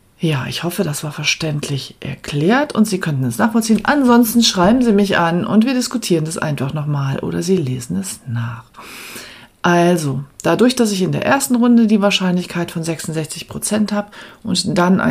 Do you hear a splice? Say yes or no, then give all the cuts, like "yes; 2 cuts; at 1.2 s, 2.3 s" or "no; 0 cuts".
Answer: no; 0 cuts